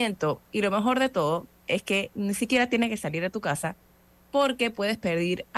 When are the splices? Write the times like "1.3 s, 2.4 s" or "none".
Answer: none